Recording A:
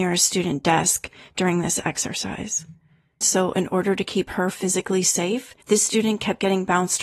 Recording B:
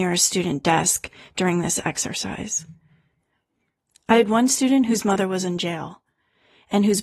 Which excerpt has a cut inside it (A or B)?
A